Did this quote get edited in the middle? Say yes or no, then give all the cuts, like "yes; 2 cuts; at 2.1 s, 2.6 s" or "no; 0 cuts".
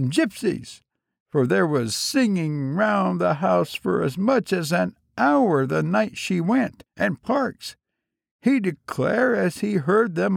yes; 1 cut; at 6.9 s